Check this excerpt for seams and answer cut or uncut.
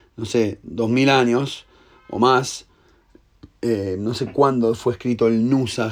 uncut